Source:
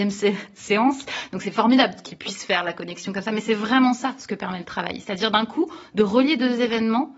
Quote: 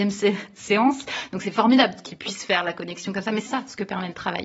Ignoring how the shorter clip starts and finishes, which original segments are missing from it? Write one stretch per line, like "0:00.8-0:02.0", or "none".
0:03.5-0:04.0